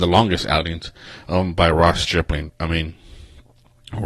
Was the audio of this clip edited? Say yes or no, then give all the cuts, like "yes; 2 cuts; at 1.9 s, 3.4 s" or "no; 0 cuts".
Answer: no; 0 cuts